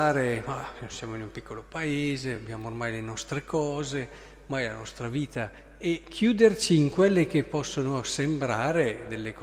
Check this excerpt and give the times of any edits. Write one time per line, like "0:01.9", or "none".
none